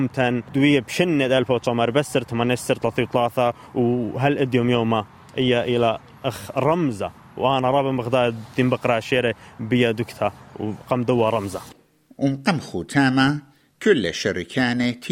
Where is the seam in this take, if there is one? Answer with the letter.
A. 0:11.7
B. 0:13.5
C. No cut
C